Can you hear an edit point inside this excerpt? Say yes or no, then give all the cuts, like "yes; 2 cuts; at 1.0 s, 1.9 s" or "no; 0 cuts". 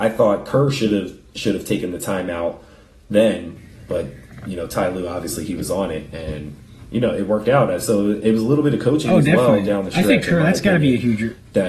yes; 1 cut; at 3.9 s